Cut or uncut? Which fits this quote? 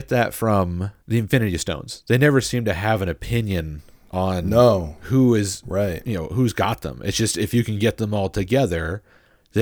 uncut